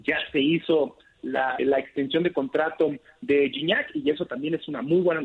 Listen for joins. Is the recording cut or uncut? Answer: cut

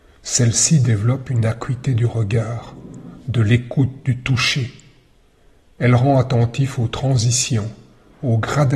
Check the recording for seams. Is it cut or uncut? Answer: uncut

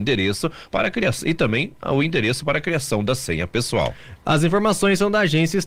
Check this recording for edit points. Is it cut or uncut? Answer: uncut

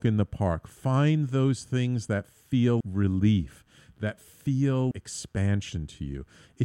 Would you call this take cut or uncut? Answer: cut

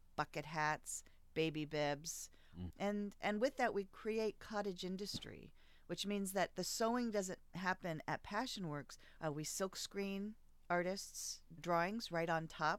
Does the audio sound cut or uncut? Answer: cut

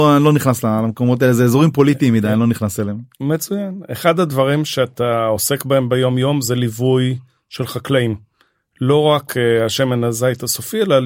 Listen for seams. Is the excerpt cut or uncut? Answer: uncut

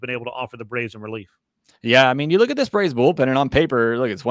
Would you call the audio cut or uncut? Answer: uncut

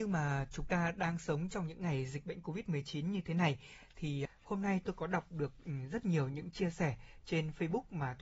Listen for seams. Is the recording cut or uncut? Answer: cut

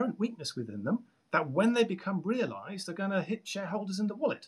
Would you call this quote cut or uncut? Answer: uncut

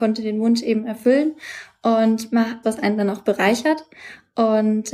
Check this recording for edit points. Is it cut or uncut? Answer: cut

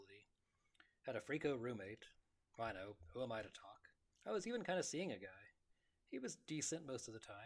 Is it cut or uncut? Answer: cut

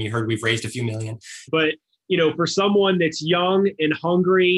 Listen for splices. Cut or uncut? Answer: cut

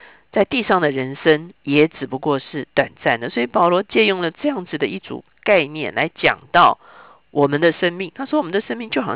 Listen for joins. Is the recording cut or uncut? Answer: uncut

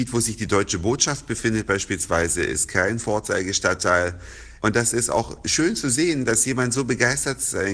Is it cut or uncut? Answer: cut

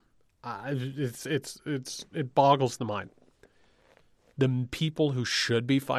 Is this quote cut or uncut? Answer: cut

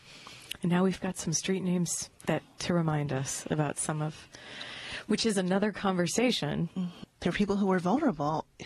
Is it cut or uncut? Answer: cut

